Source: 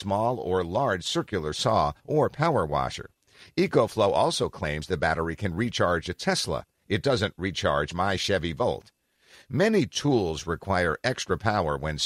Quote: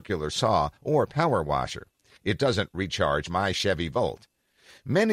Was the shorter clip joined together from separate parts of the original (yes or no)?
yes